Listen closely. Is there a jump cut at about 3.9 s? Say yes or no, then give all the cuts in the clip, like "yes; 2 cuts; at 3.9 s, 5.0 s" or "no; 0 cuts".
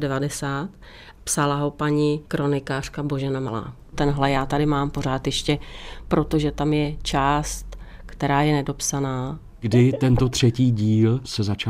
yes; 1 cut; at 3.9 s